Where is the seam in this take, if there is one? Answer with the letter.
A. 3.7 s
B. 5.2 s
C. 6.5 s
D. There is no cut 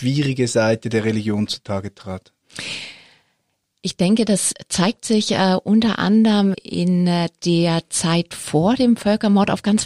C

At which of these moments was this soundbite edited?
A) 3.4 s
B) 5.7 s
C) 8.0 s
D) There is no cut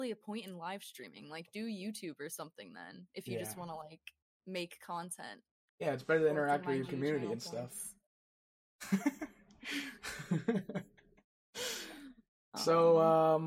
B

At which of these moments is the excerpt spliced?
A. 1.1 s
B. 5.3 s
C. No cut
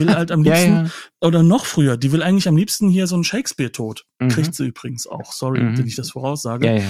C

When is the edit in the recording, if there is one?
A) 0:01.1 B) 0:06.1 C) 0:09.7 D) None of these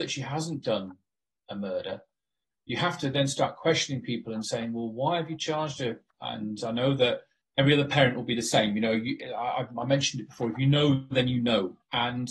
B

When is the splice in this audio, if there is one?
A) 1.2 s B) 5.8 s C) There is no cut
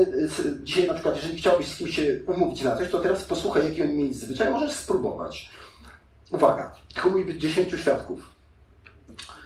C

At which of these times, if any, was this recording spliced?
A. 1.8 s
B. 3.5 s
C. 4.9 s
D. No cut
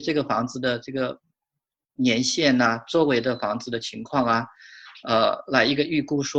D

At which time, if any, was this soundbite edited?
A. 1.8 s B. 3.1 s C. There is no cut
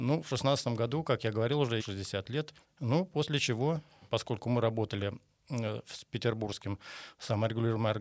A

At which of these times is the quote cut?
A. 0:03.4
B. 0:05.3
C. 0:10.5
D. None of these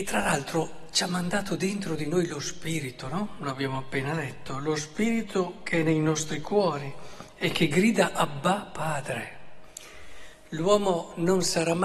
D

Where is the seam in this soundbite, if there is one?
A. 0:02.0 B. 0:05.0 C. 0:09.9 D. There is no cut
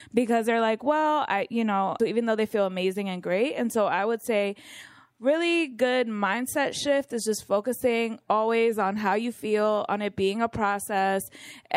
A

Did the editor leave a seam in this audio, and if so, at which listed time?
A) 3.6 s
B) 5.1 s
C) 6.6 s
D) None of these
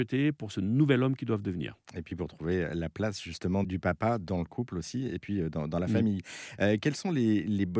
A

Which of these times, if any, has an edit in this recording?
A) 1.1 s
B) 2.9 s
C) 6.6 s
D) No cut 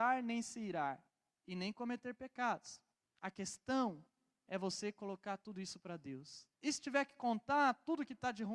D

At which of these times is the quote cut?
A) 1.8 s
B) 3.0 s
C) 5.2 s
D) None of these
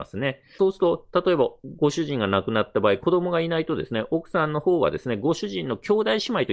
D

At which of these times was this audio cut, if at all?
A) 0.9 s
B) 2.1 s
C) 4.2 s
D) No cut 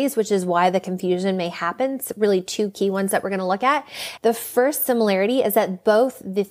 C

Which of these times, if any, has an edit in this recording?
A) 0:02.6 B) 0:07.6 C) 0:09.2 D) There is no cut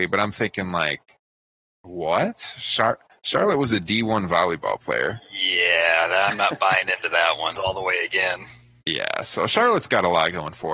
B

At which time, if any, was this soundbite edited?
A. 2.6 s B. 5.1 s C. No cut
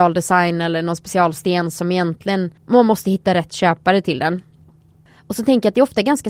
A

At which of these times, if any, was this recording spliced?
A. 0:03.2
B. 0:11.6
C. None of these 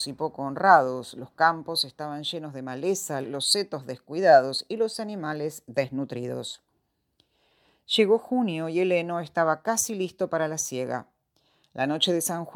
A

